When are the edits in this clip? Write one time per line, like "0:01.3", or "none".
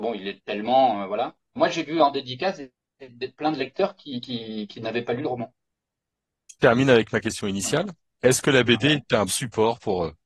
0:01.6
0:09.3